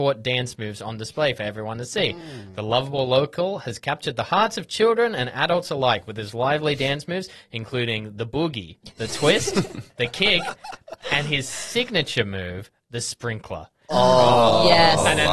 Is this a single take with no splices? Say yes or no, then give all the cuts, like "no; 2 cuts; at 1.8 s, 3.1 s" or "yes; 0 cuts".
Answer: yes; 0 cuts